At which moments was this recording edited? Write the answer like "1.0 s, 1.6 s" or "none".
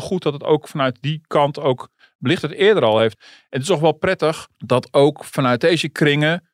3.1 s, 4.5 s